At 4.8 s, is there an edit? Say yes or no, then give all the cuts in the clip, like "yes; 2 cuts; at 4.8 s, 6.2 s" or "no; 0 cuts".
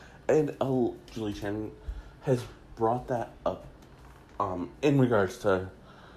yes; 2 cuts; at 1.1 s, 4.8 s